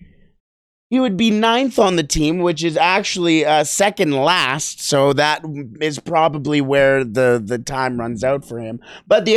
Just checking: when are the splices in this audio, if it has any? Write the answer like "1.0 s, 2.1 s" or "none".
none